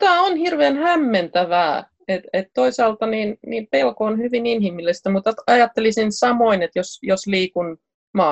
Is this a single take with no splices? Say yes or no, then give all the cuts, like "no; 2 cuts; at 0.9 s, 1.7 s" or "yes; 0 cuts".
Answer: yes; 0 cuts